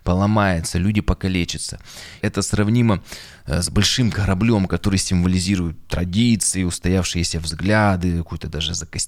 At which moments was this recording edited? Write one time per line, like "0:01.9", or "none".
0:02.2